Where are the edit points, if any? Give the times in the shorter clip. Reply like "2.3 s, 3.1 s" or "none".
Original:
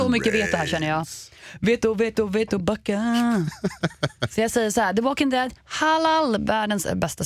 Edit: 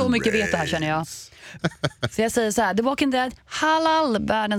1.6 s